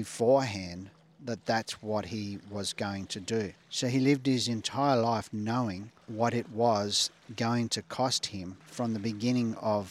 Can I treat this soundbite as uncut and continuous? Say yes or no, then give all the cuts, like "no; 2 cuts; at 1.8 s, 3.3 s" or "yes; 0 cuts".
no; 1 cut; at 8.7 s